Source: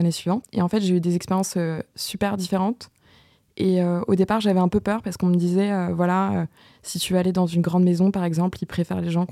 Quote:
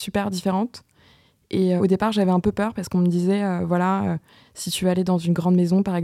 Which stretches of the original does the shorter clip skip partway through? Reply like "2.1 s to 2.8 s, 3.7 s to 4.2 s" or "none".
3.8 s to 4.1 s